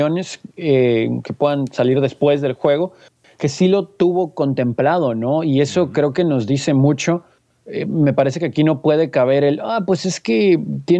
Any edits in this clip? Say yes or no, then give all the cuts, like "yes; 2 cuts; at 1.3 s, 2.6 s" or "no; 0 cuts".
no; 0 cuts